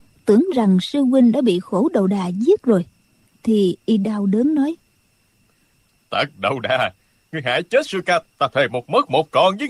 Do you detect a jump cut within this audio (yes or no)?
yes